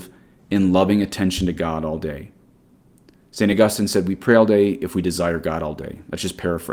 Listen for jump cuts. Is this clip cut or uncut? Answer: uncut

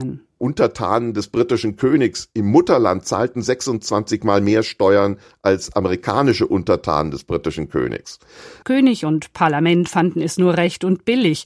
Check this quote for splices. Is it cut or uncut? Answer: cut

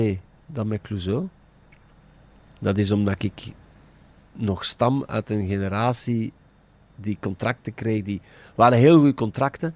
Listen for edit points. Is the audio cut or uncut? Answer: uncut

